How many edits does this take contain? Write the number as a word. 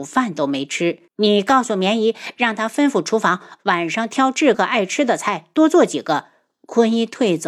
two